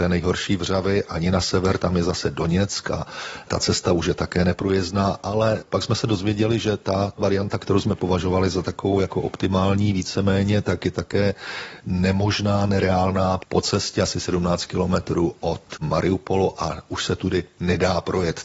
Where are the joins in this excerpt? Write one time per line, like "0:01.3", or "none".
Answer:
0:13.4